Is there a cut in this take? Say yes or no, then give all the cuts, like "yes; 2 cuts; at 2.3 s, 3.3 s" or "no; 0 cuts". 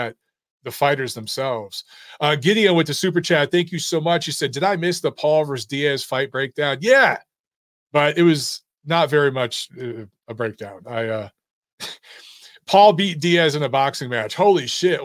no; 0 cuts